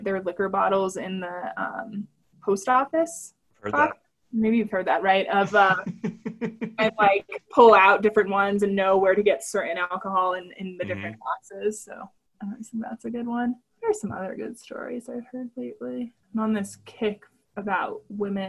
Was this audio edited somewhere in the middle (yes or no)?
no